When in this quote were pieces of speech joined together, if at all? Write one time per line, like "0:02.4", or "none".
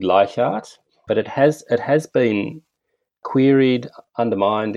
0:01.1